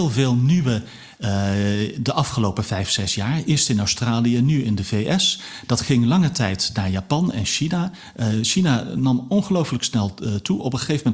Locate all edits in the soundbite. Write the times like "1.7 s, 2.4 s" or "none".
1.2 s